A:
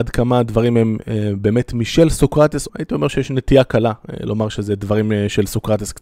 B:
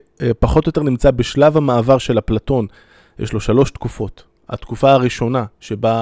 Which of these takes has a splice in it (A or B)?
A